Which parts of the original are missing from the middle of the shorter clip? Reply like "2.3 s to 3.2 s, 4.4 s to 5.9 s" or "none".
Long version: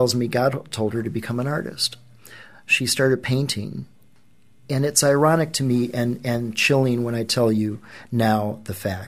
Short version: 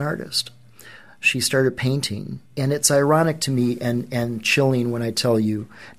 3.9 s to 4.6 s